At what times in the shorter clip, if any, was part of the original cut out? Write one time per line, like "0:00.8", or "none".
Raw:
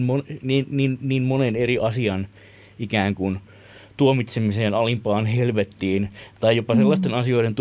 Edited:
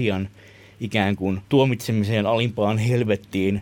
0:01.4